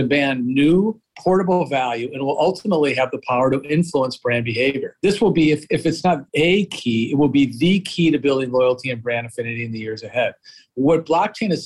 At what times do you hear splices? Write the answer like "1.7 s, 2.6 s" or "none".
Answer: none